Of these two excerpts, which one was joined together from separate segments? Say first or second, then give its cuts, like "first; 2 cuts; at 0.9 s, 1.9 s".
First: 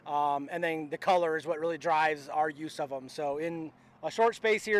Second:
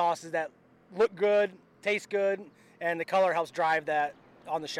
first; 1 cut; at 3.1 s